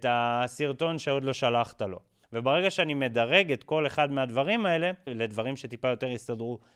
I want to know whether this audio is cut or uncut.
cut